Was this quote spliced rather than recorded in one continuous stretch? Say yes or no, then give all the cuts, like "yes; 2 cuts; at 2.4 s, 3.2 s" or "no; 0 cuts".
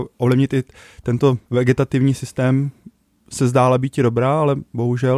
yes; 1 cut; at 1.4 s